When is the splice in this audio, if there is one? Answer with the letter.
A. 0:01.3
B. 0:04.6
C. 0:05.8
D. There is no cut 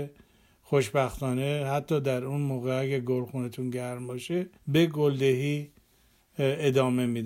B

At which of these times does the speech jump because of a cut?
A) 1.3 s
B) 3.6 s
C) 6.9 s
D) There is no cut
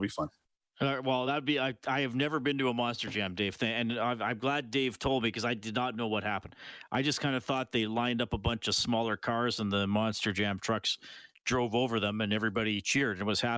D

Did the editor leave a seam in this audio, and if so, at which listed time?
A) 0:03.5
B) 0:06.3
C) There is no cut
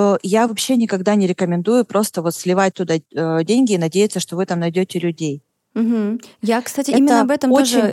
C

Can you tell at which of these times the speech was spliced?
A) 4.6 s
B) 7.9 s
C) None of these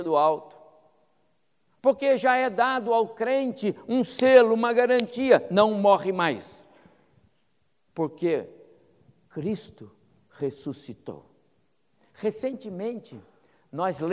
B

